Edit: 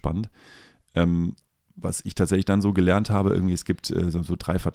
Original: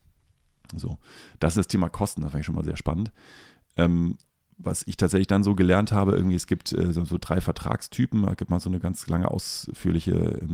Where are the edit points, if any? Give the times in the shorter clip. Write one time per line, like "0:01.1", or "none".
none